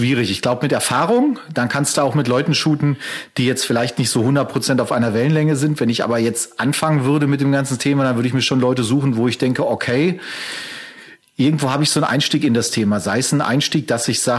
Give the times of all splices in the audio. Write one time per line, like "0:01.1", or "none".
none